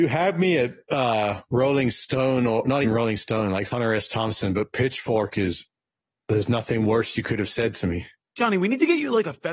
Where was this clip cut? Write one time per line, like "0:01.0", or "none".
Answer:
0:02.8